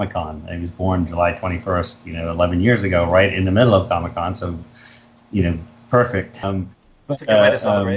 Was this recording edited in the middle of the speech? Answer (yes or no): yes